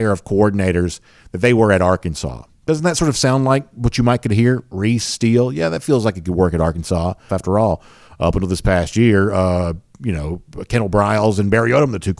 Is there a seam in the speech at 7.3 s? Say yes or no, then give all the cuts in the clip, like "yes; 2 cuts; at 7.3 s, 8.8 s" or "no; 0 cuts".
yes; 1 cut; at 7.3 s